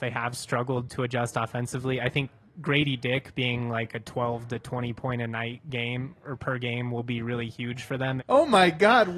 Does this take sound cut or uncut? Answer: cut